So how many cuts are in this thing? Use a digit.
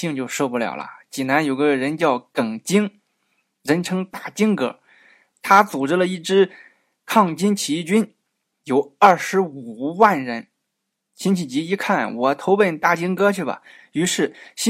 0